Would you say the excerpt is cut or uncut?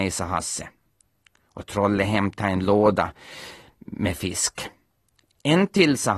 uncut